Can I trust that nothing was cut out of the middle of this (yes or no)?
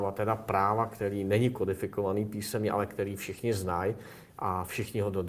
yes